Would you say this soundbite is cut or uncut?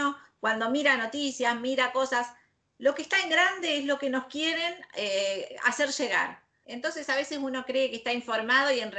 cut